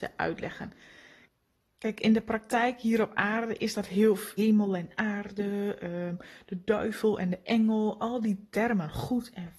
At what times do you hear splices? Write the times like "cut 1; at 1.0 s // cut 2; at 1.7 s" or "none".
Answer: cut 1; at 4.4 s